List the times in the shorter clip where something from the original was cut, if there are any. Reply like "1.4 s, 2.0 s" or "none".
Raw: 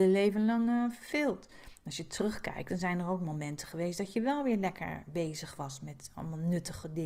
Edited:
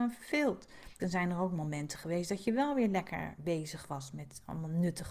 1.0 s

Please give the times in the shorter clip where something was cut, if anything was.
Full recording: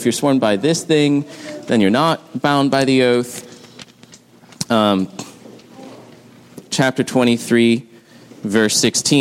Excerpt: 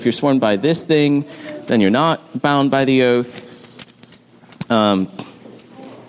none

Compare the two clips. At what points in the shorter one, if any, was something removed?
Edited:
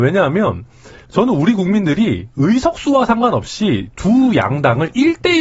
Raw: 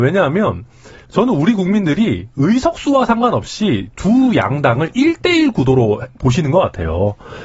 none

